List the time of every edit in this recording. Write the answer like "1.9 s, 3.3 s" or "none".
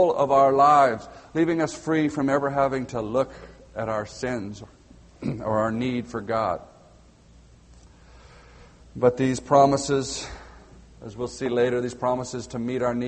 none